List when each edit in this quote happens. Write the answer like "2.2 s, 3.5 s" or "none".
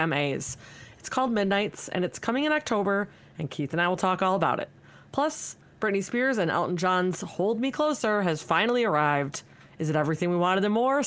none